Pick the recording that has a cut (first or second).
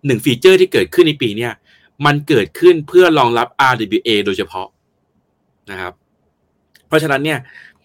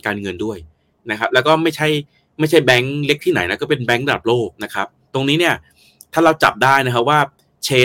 second